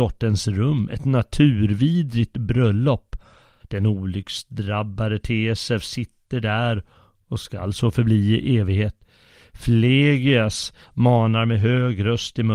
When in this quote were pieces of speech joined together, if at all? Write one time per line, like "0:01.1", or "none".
0:03.6
0:10.8